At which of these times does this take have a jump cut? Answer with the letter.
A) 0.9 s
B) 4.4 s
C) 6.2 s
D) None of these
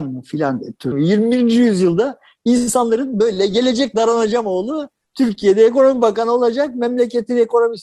A